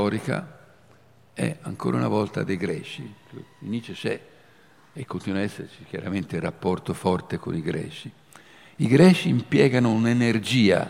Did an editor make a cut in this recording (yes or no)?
no